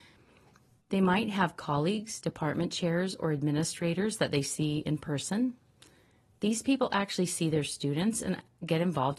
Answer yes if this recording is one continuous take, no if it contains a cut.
yes